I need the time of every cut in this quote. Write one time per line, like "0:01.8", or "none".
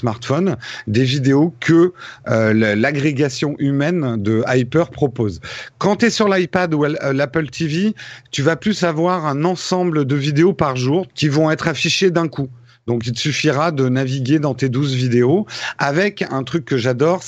0:11.1

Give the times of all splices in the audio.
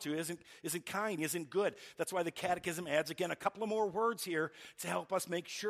0:01.2

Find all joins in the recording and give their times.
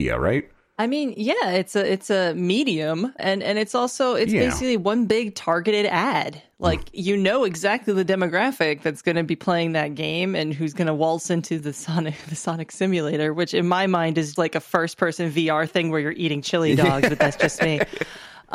0:03.2
0:14.4

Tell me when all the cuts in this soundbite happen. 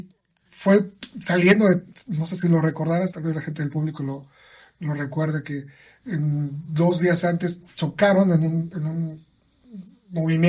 0:03.1

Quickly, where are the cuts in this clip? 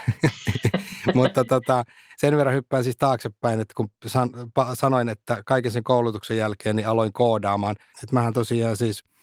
0:07.9

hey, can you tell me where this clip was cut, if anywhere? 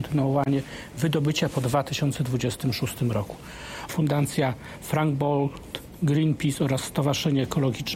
0:03.9

